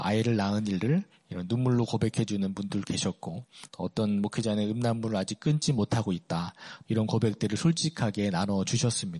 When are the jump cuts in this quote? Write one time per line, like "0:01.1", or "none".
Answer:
0:03.7
0:06.8